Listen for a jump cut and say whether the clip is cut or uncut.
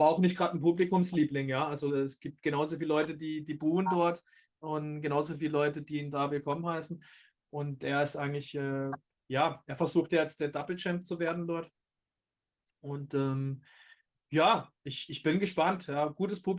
uncut